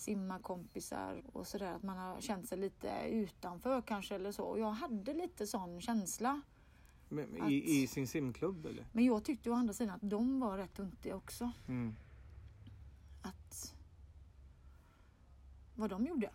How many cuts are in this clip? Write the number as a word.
two